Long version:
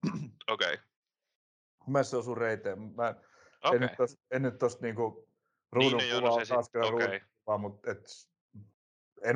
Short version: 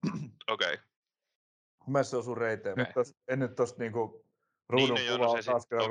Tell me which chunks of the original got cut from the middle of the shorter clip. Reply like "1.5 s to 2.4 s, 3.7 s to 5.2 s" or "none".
2.8 s to 3.8 s